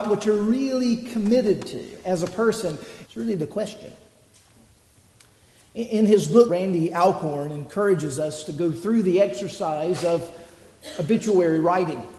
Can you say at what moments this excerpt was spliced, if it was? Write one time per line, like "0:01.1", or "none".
0:03.0
0:06.5